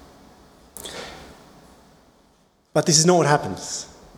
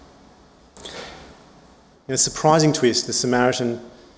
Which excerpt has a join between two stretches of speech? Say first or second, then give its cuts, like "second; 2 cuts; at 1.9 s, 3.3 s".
second; 1 cut; at 1.9 s